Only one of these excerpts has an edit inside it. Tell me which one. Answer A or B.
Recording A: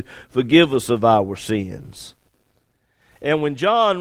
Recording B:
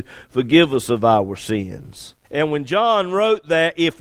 B